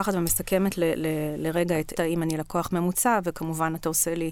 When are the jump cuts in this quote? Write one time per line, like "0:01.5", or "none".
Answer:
0:01.9